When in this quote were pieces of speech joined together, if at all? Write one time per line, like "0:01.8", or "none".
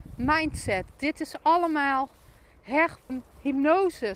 0:03.1